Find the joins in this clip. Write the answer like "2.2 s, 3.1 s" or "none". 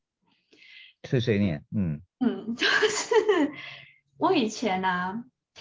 none

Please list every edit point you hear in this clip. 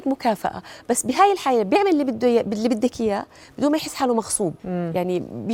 4.6 s

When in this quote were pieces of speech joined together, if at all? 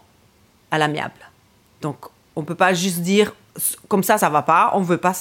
none

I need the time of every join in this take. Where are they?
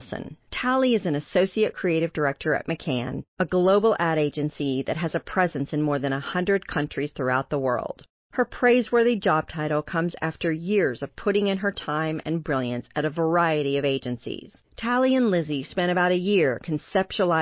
14.6 s

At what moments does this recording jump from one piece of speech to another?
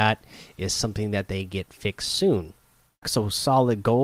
3.0 s

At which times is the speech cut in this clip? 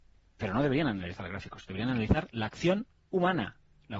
none

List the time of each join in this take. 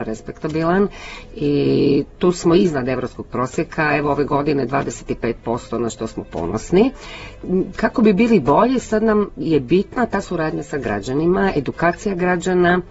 none

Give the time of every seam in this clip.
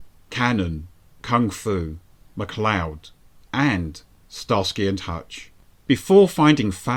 1.2 s, 5.9 s

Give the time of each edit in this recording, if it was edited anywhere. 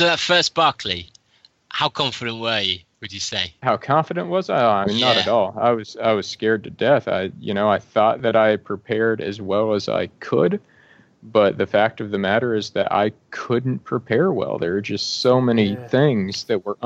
3.6 s

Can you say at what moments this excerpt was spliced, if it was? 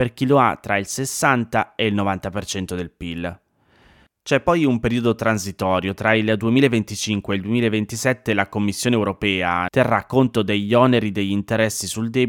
9.7 s

